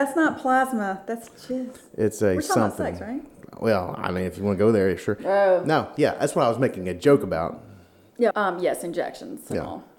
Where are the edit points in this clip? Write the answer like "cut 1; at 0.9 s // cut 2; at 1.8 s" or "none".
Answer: cut 1; at 8.3 s